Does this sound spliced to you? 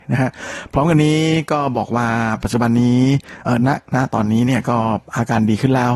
no; 0 cuts

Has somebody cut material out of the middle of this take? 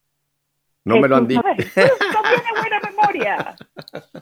yes; 1 cut; at 1.4 s

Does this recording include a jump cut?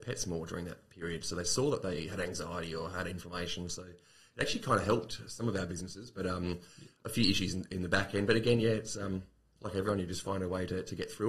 no; 0 cuts

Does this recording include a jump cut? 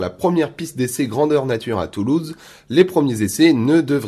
no; 0 cuts

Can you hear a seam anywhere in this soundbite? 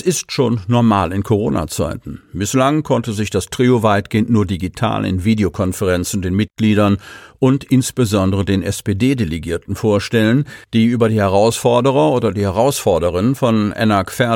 no; 0 cuts

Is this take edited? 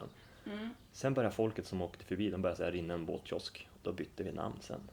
yes; 1 cut; at 3.8 s

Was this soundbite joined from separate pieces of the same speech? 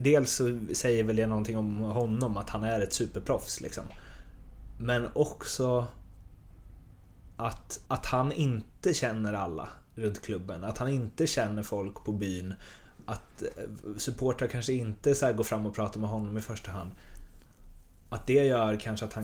yes; 1 cut; at 7.9 s

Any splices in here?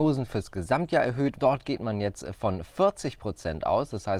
yes; 1 cut; at 1.3 s

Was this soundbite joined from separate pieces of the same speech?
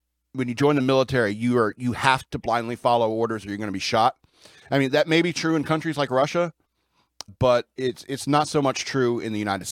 yes; 1 cut; at 7.3 s

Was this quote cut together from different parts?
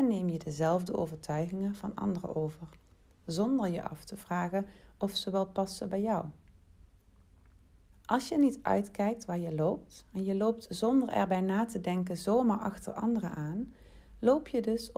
yes; 1 cut; at 7.9 s

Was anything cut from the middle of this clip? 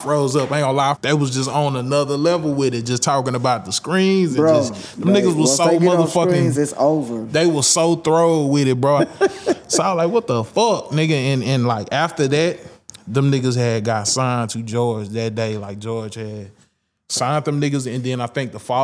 yes; 2 cuts; at 0.9 s, 9.0 s

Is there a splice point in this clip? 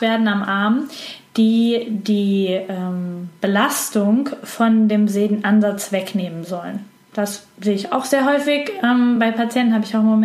no; 0 cuts

